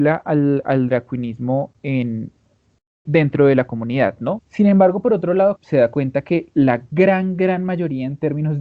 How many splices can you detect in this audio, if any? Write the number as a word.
three